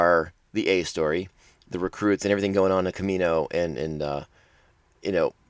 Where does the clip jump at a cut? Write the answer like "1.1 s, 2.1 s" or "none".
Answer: 1.6 s